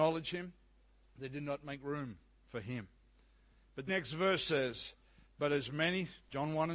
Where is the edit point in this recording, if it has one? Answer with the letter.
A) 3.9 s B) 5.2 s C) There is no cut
A